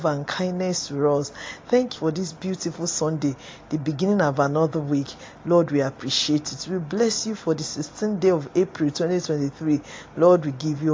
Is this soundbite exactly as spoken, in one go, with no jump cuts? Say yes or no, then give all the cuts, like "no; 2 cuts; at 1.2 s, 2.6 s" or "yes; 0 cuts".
no; 1 cut; at 2.0 s